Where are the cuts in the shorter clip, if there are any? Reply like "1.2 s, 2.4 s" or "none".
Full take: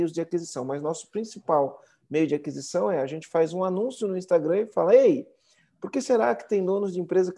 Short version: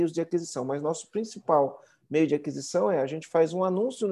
none